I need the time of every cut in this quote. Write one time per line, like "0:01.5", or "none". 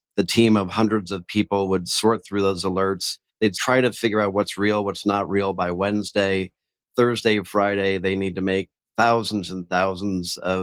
0:03.3